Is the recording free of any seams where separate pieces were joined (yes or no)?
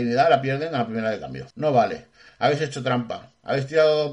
no